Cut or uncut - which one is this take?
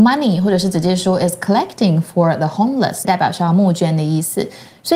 cut